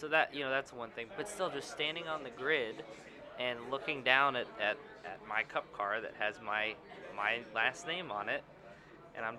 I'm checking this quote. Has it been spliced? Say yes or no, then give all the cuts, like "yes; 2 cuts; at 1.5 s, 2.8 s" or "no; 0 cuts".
yes; 1 cut; at 1.1 s